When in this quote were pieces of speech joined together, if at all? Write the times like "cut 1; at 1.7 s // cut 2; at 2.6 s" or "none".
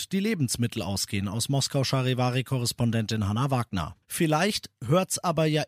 cut 1; at 4.0 s